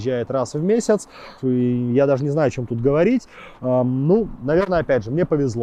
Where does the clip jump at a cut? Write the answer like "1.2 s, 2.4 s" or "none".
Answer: 1.4 s